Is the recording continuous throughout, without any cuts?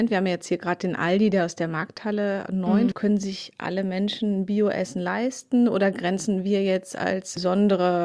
no; 1 cut; at 2.9 s

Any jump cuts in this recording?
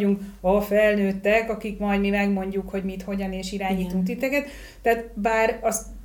no; 0 cuts

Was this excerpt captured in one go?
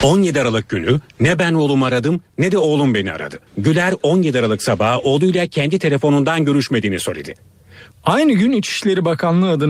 no; 2 cuts; at 3.5 s, 7.9 s

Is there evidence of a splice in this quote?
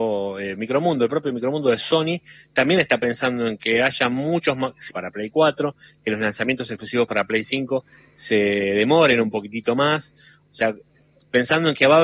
yes; 1 cut; at 4.9 s

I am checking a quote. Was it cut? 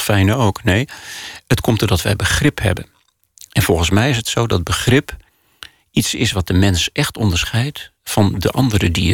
no; 0 cuts

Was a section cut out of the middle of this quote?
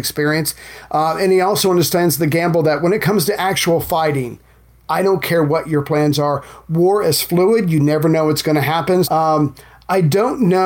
yes; 1 cut; at 9.0 s

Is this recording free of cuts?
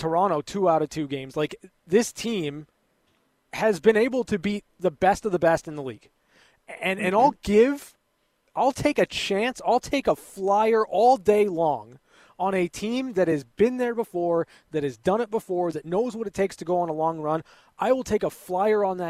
no; 1 cut; at 15.7 s

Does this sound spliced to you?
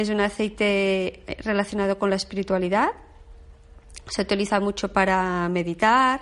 no; 0 cuts

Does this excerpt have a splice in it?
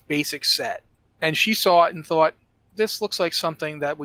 no; 0 cuts

